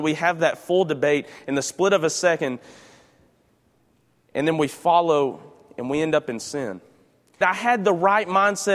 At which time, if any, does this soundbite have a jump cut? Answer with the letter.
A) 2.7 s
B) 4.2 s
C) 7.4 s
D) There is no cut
C